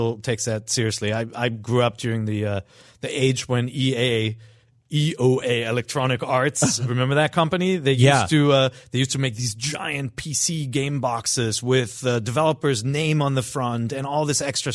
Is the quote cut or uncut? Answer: uncut